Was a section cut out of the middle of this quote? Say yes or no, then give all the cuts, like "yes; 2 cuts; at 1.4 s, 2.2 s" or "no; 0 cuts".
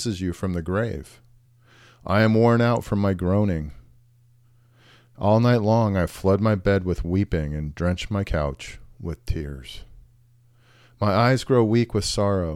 no; 0 cuts